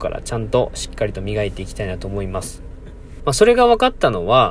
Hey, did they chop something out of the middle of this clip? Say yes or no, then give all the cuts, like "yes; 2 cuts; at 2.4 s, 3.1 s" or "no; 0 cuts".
yes; 1 cut; at 3.2 s